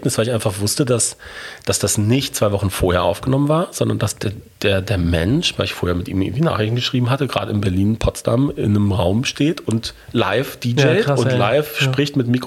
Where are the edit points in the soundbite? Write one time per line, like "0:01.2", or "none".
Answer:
none